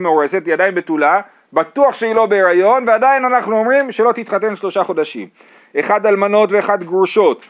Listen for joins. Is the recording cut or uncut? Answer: uncut